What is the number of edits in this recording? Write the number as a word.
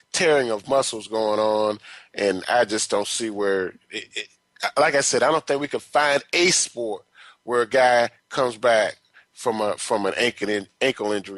zero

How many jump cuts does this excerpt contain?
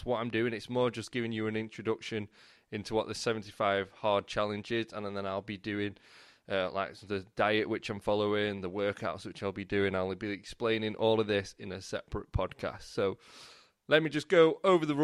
zero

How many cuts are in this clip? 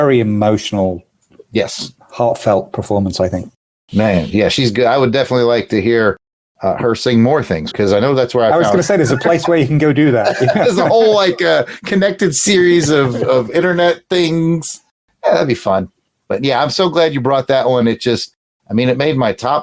one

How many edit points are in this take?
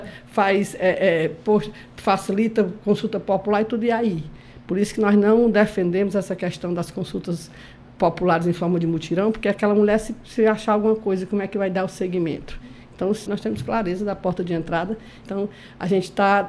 two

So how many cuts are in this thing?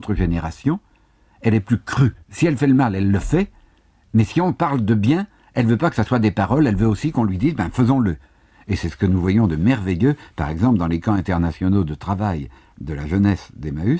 one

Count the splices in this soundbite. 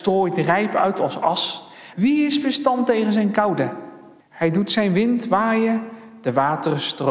two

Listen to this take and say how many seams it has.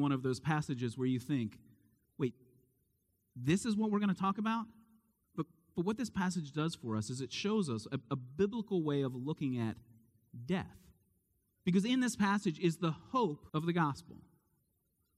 two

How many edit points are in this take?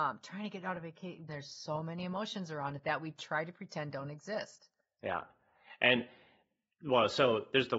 one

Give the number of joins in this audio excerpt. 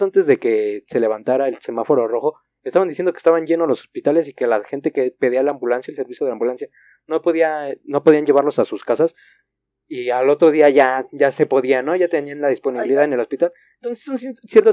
zero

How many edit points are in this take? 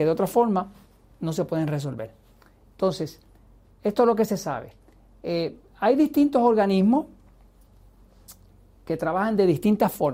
zero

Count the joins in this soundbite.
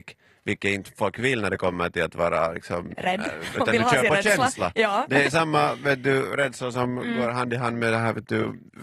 one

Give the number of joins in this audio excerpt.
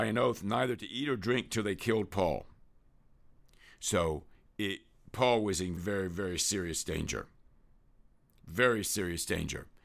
one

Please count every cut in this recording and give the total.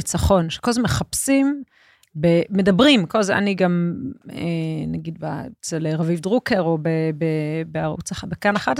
zero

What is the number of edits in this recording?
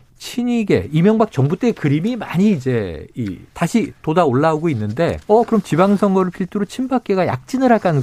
two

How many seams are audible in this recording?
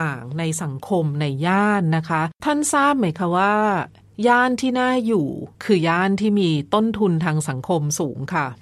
one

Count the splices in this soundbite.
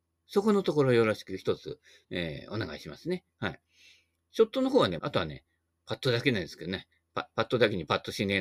two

